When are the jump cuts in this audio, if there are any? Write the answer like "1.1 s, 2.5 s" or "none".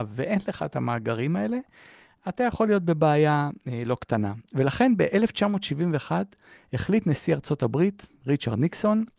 none